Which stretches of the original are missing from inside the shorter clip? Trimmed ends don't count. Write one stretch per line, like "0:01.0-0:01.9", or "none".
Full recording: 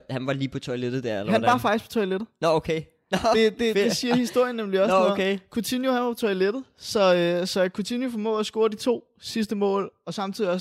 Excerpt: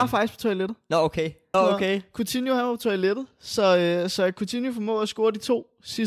0:03.1-0:04.9

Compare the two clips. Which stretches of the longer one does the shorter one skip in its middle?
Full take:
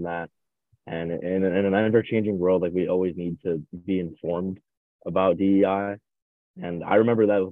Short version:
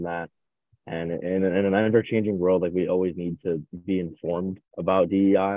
0:04.7-0:04.9

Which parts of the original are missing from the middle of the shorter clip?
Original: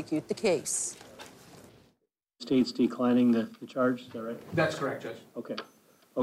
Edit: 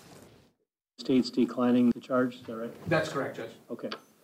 0:03.3-0:03.6

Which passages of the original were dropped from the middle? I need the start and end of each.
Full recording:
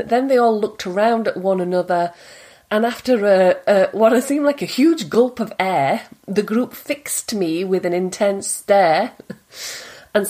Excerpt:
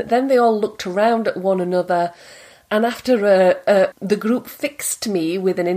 0:03.9-0:06.2

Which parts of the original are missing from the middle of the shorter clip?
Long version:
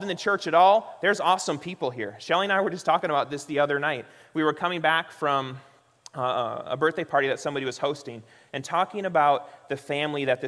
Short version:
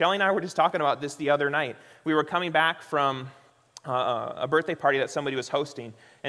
none

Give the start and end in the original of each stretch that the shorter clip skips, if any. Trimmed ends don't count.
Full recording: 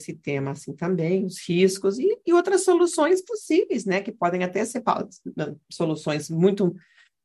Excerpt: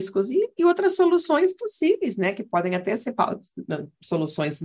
none

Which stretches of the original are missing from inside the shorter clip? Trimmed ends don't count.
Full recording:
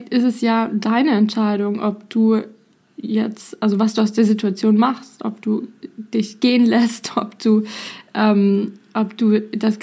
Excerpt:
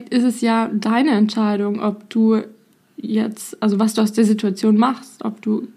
none

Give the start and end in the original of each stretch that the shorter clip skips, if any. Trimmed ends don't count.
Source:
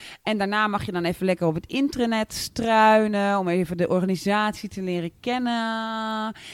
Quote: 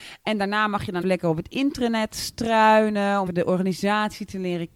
0:01.0-0:01.2
0:03.4-0:03.7

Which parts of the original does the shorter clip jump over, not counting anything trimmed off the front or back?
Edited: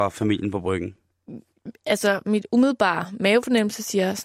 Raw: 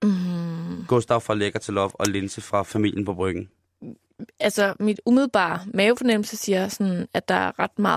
none

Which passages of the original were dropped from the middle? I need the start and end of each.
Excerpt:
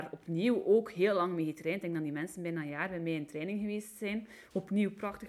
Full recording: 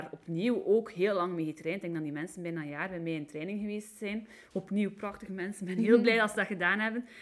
none

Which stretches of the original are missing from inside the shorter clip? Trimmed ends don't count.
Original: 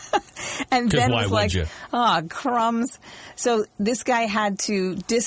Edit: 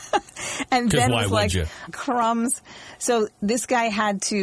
0:01.9-0:02.2

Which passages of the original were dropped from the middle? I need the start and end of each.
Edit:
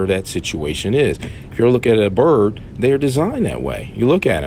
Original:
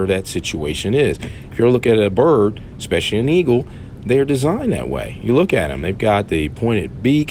0:02.7-0:04.0

